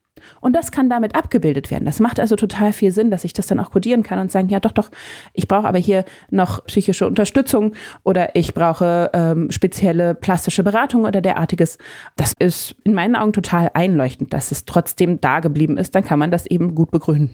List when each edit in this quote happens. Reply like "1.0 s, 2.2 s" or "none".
6.6 s